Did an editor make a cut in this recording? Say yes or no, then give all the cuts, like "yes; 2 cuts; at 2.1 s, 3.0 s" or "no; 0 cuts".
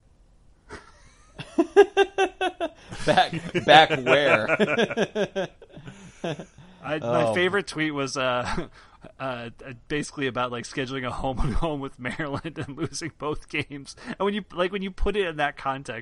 no; 0 cuts